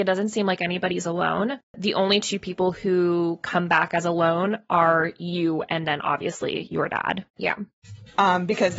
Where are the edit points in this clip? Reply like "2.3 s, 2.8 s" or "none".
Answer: 1.7 s, 7.4 s